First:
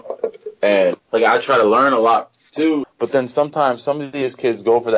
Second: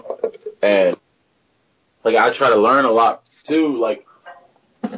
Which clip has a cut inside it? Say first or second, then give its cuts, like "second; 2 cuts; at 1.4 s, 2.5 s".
first; 2 cuts; at 1.0 s, 2.8 s